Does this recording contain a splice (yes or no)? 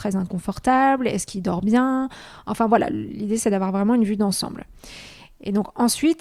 no